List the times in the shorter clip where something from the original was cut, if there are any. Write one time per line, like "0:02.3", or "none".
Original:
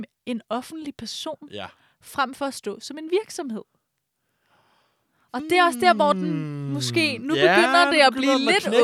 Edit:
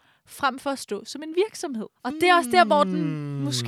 0:02.0